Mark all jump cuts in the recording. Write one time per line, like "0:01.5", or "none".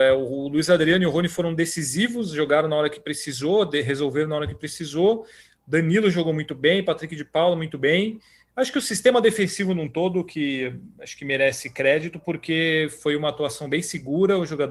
none